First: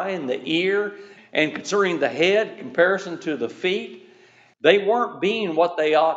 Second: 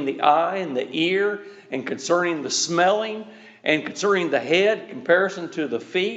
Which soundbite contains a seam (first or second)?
first